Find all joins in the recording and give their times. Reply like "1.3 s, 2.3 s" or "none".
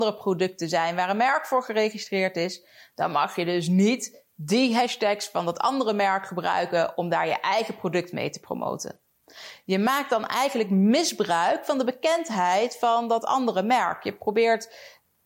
none